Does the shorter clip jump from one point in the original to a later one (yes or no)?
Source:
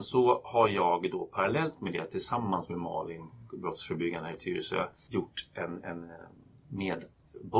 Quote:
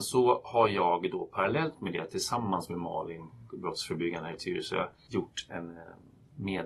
yes